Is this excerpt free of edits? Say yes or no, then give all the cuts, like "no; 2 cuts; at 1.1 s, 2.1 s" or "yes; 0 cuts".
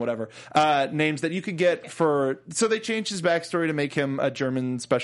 yes; 0 cuts